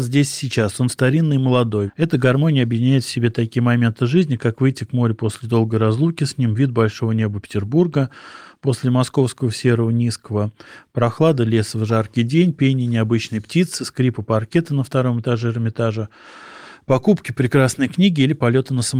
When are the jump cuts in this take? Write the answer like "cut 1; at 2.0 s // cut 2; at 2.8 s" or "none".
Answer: cut 1; at 1.9 s